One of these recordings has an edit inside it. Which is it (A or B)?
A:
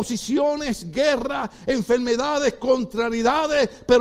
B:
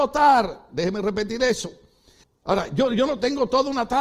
B